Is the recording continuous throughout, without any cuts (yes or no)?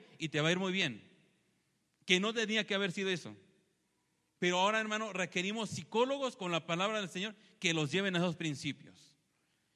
yes